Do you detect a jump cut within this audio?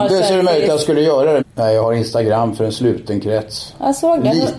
yes; 1 cut; at 1.4 s

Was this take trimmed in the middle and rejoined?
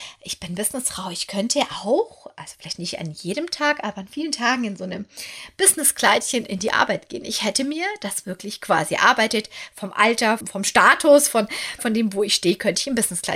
yes; 2 cuts; at 10.4 s, 11.8 s

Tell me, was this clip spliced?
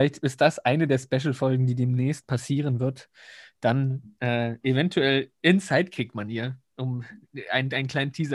no; 0 cuts

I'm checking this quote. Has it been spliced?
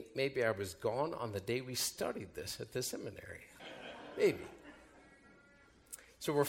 yes; 1 cut; at 3.6 s

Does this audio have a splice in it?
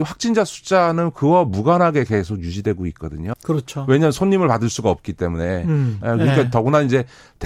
yes; 2 cuts; at 3.3 s, 6.0 s

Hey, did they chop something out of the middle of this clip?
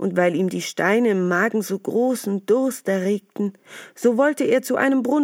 no; 0 cuts

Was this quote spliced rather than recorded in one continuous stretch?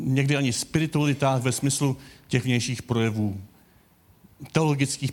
no; 0 cuts

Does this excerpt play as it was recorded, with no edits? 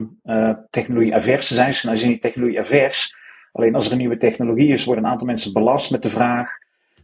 yes; 0 cuts

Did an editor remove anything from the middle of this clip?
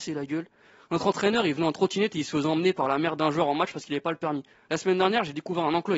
yes; 1 cut; at 4.5 s

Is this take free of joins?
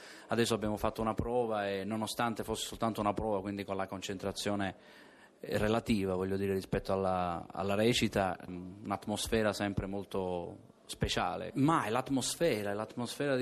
no; 2 cuts; at 8.5 s, 11.5 s

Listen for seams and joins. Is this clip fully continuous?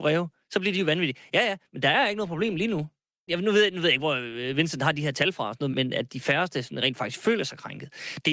no; 2 cuts; at 3.3 s, 5.7 s

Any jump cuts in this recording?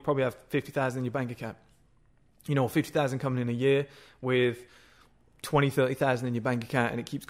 no; 0 cuts

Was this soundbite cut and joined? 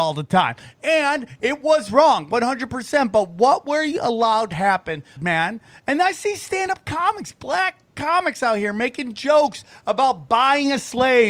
yes; 1 cut; at 5.2 s

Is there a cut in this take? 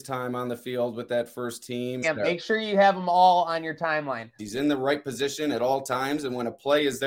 yes; 2 cuts; at 2.0 s, 4.4 s

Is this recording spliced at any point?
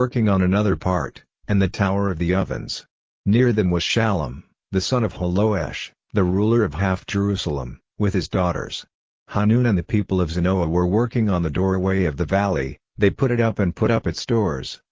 no; 0 cuts

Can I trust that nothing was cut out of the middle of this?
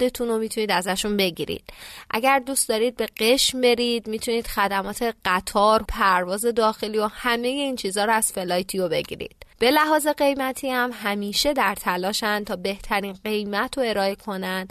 no; 2 cuts; at 5.8 s, 9.5 s

